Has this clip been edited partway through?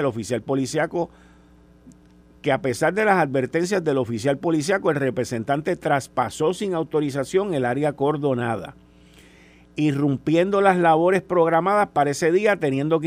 no; 0 cuts

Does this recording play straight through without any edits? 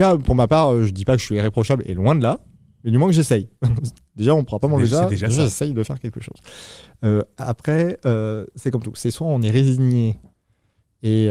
yes; 0 cuts

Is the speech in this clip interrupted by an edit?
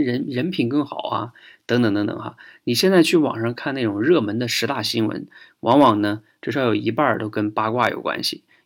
no; 0 cuts

